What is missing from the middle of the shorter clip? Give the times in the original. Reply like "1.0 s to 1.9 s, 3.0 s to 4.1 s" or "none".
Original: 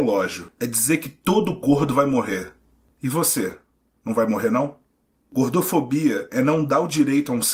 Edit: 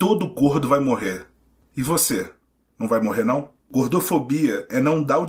4.9 s to 5.2 s